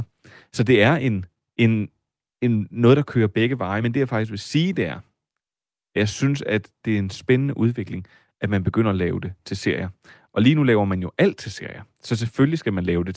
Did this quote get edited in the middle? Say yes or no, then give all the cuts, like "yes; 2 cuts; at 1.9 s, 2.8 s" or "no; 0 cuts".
no; 0 cuts